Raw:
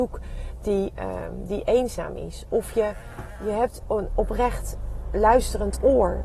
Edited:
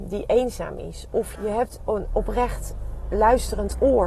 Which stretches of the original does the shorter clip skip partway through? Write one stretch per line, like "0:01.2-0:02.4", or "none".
0:02.7-0:03.4